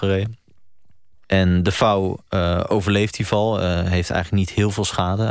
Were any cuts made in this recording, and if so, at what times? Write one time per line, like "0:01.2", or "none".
0:01.2